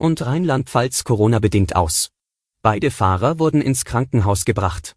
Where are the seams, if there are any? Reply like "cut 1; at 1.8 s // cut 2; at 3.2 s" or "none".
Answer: cut 1; at 2.5 s